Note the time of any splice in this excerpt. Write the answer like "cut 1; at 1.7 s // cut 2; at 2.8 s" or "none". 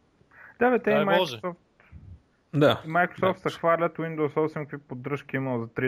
none